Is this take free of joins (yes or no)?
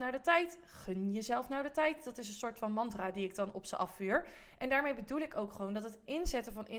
yes